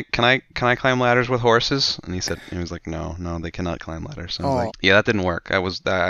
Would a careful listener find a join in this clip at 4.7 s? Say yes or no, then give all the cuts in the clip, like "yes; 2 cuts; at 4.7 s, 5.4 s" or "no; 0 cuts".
yes; 1 cut; at 4.7 s